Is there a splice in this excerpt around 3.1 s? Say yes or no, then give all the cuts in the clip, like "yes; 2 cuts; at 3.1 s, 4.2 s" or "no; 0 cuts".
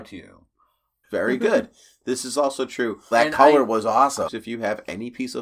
yes; 3 cuts; at 1.0 s, 3.1 s, 4.3 s